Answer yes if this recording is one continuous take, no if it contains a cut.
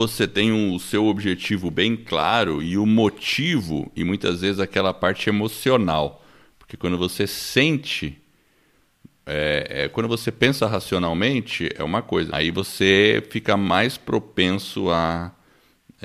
no